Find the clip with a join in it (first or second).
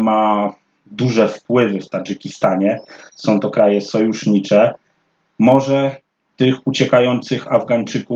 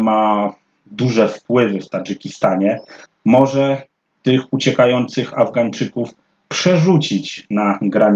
second